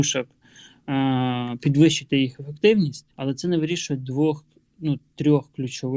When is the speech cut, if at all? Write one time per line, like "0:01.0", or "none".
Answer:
0:03.1